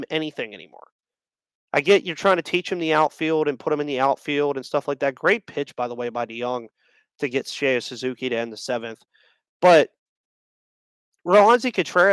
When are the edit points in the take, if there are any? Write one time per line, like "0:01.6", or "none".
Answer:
none